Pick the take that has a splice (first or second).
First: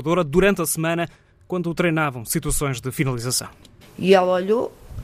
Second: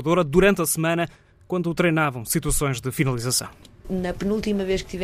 first